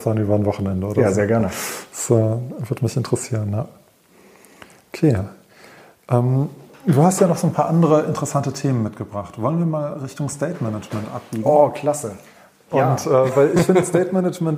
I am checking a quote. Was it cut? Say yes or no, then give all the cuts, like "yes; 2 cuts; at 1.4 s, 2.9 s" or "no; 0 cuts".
no; 0 cuts